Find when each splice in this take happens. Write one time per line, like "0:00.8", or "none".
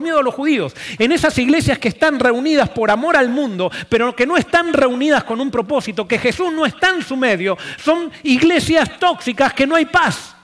0:01.0

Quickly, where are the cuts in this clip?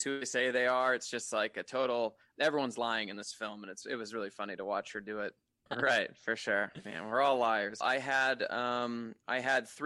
0:05.7
0:07.8

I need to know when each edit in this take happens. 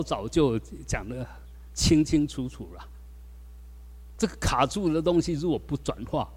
0:04.2

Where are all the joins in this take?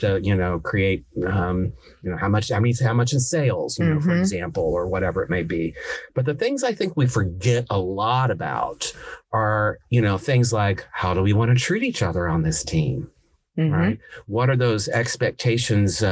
0:06.1

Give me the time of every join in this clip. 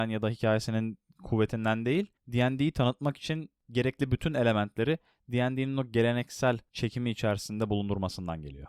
none

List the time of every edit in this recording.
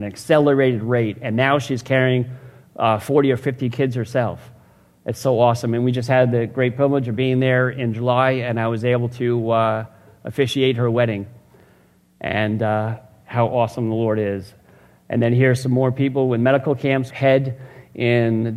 0:17.1

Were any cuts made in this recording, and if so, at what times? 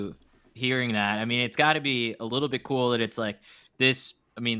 none

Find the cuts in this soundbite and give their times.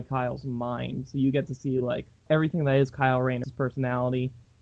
0:03.4

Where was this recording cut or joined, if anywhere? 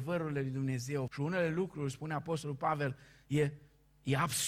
0:01.1

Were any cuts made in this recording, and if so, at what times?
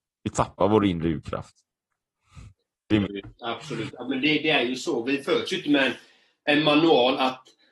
0:03.0

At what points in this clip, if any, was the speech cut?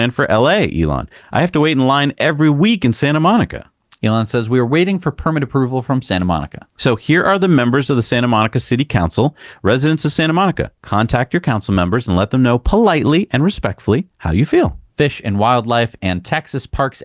0:14.9

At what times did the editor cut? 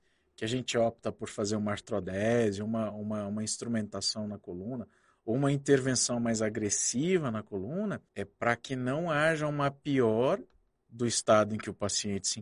0:08.1

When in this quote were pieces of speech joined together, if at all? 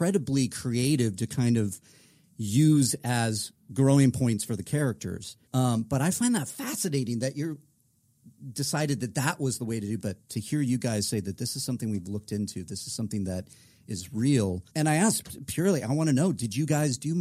0:05.5
0:10.0
0:14.7

